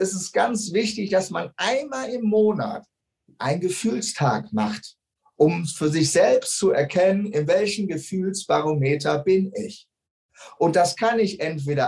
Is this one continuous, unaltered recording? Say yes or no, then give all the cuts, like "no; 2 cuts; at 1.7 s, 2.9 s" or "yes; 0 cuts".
yes; 0 cuts